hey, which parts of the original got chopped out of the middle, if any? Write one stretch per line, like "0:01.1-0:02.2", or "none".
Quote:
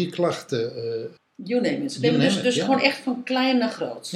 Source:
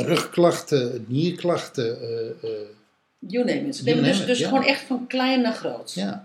0:02.4-0:03.0